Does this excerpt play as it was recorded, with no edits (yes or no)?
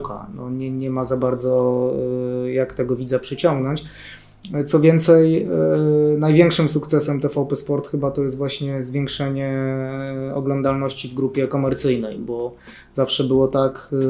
yes